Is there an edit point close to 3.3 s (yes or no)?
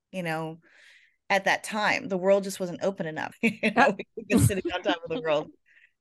yes